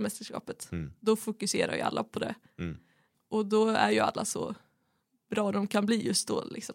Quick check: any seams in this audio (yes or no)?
no